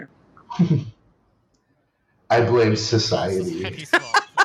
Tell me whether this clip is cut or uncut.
cut